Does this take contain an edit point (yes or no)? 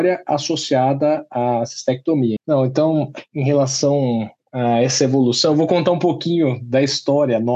yes